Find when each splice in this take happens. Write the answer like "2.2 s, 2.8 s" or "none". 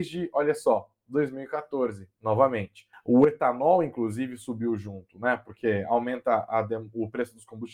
2.9 s